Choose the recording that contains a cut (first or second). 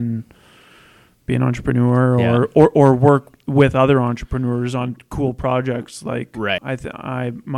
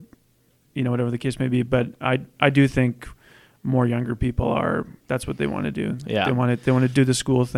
first